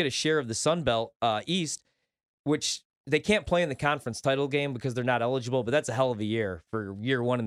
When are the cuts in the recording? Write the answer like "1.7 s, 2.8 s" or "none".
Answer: none